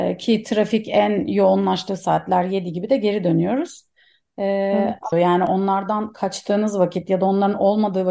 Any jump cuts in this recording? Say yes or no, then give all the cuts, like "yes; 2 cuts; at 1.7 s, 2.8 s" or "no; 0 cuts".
yes; 1 cut; at 5.1 s